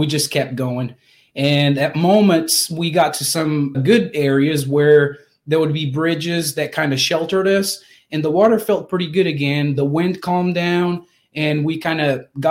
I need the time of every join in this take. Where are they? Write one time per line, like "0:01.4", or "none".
0:03.7